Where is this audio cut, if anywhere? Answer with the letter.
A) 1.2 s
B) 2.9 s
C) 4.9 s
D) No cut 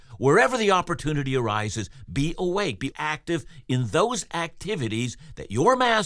B